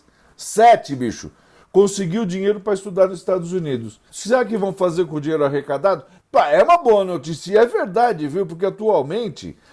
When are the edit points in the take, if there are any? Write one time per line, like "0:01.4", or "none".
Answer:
0:04.1
0:06.2